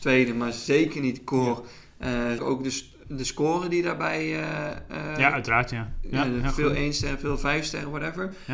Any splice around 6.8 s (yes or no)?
no